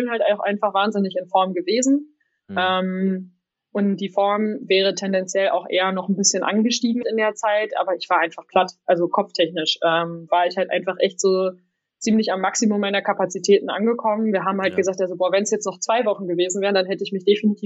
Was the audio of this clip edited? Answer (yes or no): yes